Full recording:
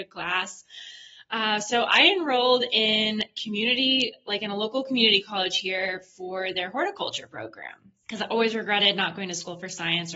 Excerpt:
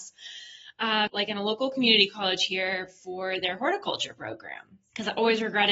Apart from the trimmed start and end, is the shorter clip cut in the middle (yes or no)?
yes